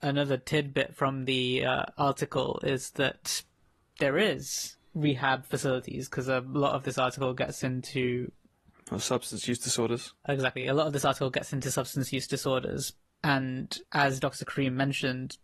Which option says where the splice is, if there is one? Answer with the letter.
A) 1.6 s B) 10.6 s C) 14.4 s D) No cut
D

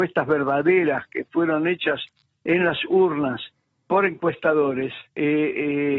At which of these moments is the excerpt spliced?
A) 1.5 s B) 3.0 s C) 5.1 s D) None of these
C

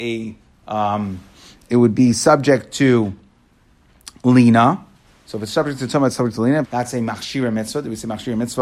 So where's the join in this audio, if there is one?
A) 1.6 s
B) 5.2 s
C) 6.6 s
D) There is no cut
C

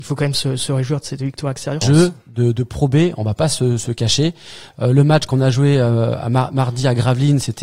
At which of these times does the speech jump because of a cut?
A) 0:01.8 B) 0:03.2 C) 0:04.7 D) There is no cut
A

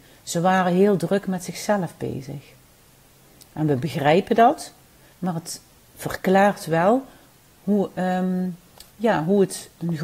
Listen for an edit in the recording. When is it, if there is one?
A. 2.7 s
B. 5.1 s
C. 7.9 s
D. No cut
B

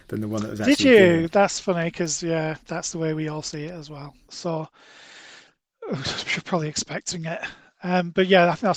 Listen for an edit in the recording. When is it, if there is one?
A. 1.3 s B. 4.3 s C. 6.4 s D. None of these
B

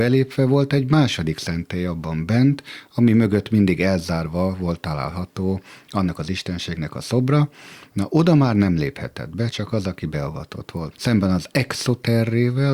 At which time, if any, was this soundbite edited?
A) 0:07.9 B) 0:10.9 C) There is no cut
B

